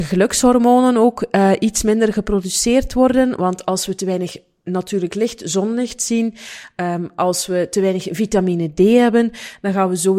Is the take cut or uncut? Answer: uncut